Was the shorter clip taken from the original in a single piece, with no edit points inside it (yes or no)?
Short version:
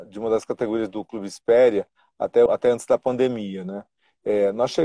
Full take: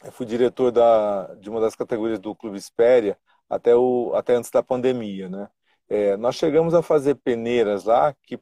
no